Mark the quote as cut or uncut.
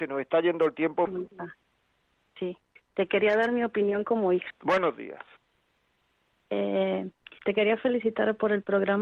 cut